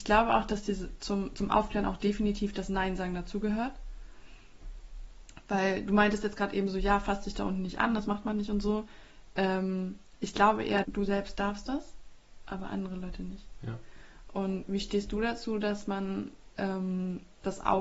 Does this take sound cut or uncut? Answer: cut